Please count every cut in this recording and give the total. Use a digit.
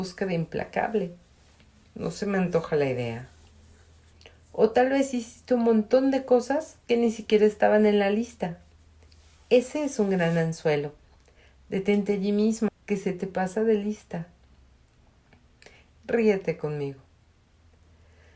2